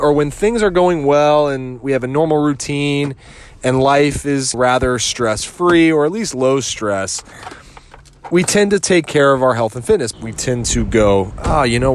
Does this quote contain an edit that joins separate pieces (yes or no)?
yes